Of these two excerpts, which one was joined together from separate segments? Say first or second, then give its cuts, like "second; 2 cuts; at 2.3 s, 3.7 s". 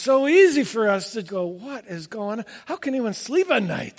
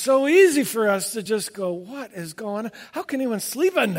first; 1 cut; at 1.3 s